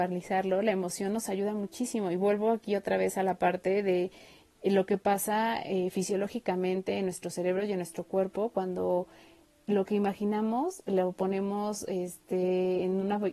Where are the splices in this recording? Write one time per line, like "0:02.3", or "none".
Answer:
none